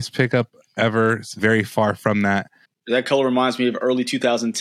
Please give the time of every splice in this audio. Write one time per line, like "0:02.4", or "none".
0:01.4
0:02.6